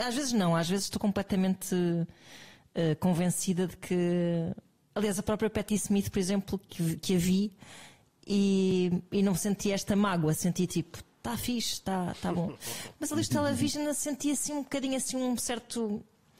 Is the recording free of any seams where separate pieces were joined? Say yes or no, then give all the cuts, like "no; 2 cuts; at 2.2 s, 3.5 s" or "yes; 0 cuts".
yes; 0 cuts